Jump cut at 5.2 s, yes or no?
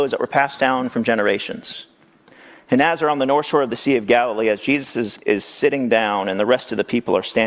yes